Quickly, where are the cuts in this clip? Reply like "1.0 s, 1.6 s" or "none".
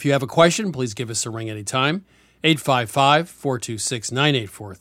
none